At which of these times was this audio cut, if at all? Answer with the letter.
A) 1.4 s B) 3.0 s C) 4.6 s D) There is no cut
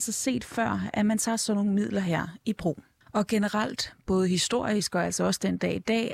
B